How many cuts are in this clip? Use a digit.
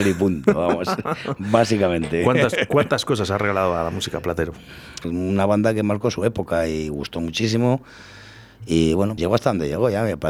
2